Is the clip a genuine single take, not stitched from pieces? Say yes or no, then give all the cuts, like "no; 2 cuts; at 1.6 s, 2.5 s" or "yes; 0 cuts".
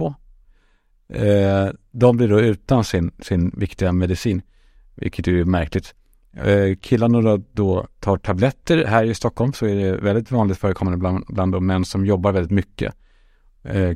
yes; 0 cuts